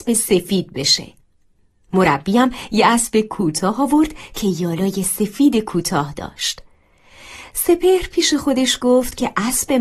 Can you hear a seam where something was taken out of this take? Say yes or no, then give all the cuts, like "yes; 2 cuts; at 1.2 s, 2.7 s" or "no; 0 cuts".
no; 0 cuts